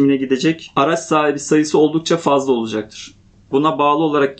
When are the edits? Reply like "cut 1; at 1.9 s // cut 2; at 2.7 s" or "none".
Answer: cut 1; at 3.5 s